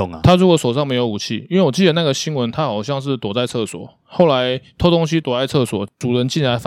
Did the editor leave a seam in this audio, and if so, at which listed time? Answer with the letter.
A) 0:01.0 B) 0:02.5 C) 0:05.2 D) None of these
C